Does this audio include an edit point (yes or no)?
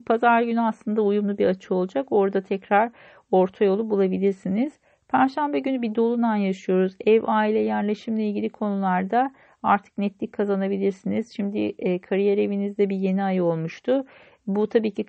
no